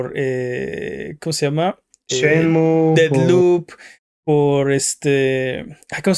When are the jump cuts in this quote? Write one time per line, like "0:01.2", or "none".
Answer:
none